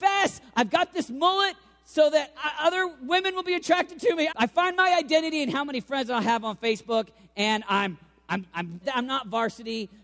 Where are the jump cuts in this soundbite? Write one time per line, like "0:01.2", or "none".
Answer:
0:04.3
0:08.8